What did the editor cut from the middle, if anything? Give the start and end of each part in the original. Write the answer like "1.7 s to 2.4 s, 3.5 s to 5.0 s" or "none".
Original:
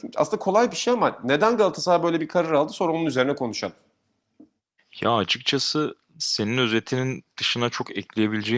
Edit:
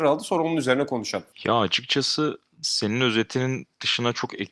3.8 s to 4.9 s